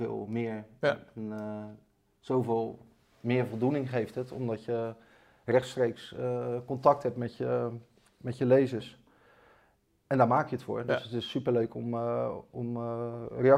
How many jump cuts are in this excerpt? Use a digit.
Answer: 0